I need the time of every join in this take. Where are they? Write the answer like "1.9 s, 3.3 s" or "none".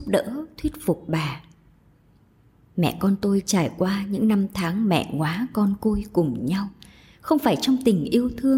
none